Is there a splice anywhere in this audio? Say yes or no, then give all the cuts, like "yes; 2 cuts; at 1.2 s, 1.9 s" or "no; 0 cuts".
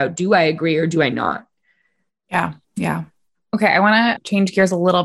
yes; 1 cut; at 2.6 s